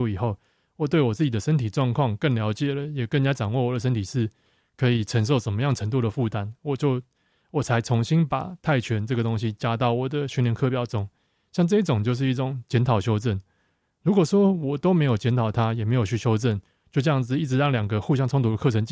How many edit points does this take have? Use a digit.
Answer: 0